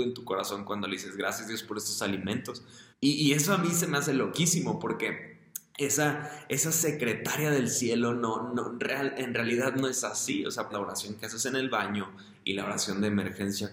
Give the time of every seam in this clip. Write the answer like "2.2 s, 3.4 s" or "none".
2.9 s, 10.7 s